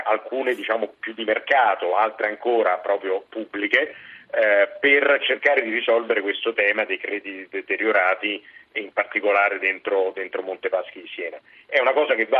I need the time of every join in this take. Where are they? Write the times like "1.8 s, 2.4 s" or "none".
1.9 s